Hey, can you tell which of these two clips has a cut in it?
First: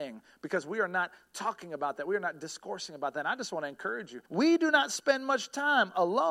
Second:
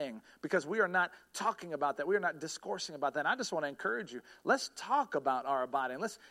first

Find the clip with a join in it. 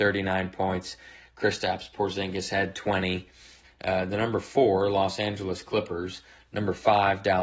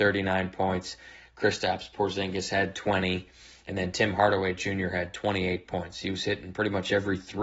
first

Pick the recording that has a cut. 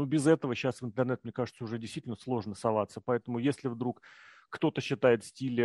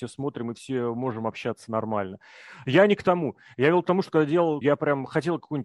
second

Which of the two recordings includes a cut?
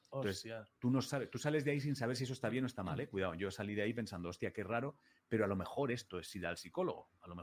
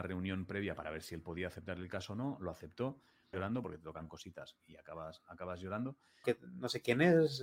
second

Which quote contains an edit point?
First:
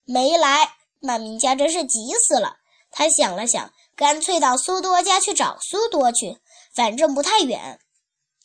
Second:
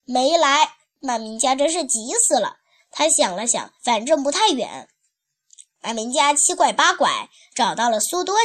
second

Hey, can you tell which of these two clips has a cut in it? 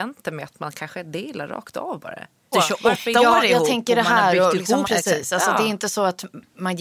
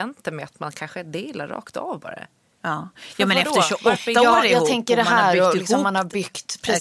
first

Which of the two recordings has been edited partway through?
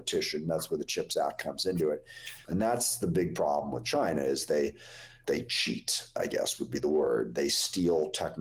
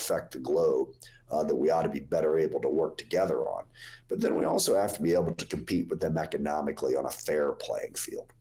first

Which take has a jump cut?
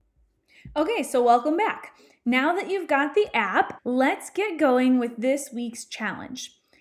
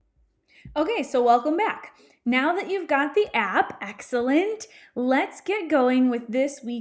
first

